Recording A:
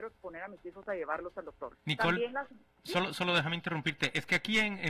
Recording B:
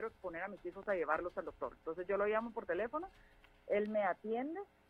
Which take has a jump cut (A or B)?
A